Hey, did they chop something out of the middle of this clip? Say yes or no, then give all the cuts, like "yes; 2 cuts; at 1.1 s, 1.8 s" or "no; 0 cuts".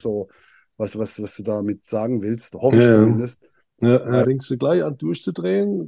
yes; 1 cut; at 4.2 s